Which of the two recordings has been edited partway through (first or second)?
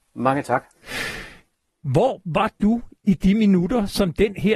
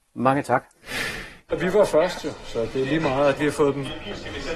second